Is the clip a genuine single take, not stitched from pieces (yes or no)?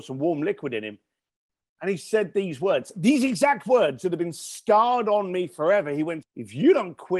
no